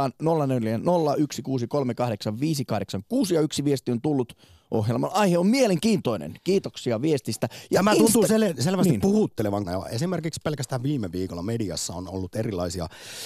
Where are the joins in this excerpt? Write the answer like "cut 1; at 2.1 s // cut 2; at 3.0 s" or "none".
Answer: cut 1; at 9.6 s

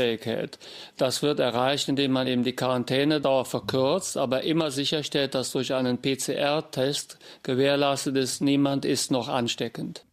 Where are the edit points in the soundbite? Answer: none

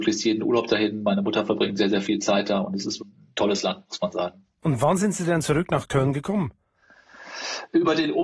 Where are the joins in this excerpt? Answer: cut 1; at 3.0 s

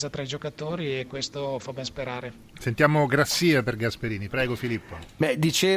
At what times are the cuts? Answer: none

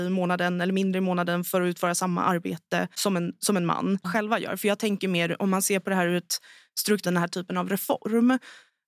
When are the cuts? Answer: cut 1; at 4.0 s // cut 2; at 7.0 s

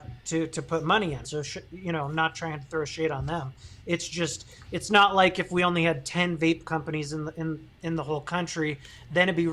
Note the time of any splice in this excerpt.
cut 1; at 1.2 s

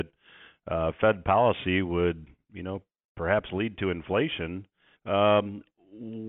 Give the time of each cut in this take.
cut 1; at 5.0 s

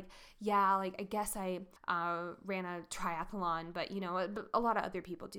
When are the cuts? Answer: cut 1; at 1.8 s

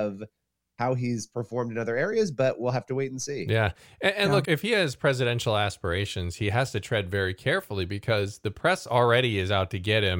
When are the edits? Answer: cut 1; at 4.4 s

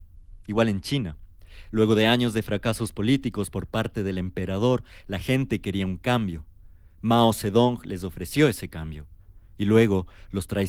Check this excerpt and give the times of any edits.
none

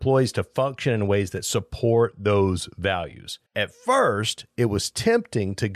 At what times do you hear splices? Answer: cut 1; at 3.5 s

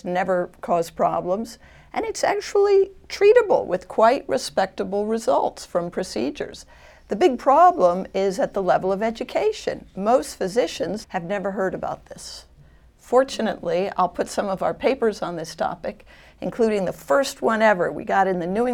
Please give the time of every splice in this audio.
cut 1; at 11.0 s

